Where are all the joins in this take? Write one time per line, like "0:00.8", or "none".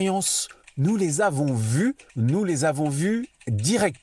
0:02.1